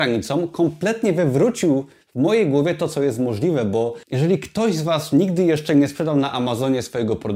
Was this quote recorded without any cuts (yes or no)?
no